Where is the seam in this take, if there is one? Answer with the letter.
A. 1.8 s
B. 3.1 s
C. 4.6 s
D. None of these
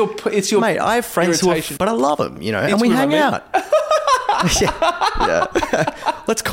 A